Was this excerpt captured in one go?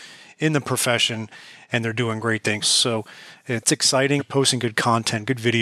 no; 2 cuts; at 2.6 s, 4.2 s

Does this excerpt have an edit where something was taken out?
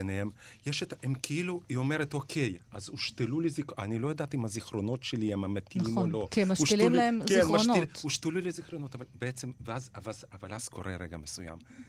no; 0 cuts

